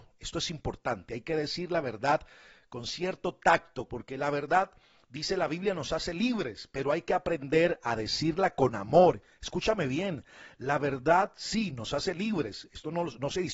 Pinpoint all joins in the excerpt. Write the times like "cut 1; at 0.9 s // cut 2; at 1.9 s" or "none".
cut 1; at 3.9 s